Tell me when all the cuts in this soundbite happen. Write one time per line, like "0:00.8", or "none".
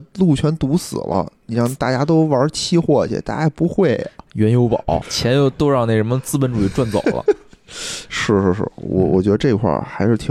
0:05.0